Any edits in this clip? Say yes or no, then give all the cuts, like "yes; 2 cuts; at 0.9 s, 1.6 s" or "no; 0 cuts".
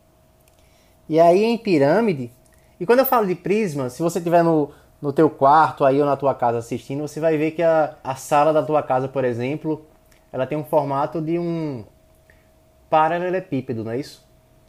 yes; 1 cut; at 8.0 s